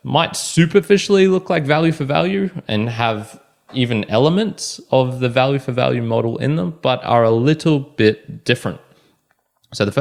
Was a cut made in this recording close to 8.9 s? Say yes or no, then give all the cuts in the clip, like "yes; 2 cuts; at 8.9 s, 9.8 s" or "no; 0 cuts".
no; 0 cuts